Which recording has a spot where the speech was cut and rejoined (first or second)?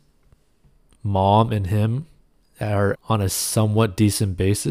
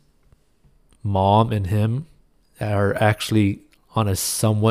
first